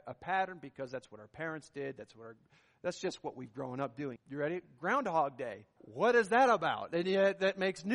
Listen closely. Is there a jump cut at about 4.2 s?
yes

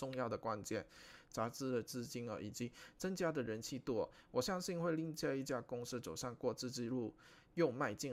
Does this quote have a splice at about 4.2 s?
no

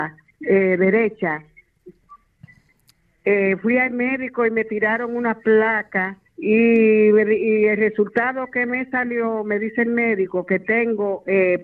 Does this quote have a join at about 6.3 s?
yes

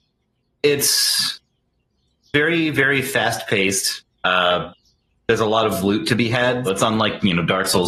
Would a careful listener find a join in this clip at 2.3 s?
no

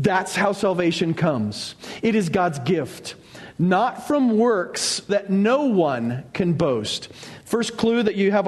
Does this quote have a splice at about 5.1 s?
yes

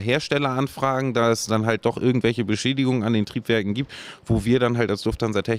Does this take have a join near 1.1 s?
no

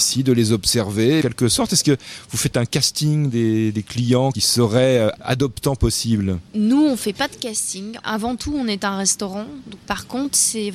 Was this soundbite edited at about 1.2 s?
yes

